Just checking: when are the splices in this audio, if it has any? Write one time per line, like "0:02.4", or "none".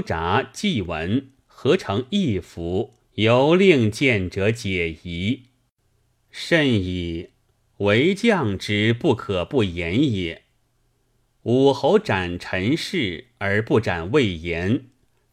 0:03.0